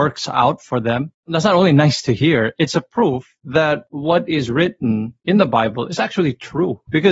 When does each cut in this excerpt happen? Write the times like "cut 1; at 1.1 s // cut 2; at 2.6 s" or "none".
none